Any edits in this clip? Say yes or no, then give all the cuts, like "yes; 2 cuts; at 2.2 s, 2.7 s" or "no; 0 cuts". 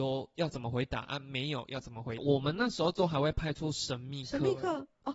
yes; 1 cut; at 2.2 s